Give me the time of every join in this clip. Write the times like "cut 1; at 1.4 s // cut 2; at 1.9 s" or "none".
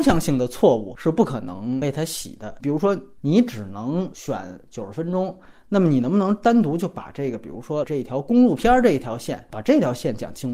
cut 1; at 3.2 s